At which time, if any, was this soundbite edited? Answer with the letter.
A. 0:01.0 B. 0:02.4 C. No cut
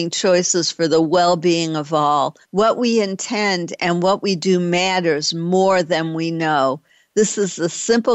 B